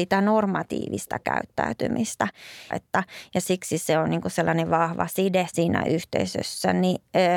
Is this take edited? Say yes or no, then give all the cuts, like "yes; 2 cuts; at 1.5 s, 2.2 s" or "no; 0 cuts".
yes; 2 cuts; at 2.7 s, 5.5 s